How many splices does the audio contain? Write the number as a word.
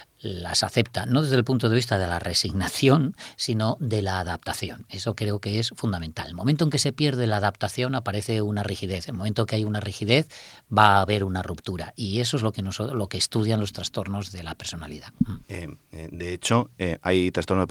one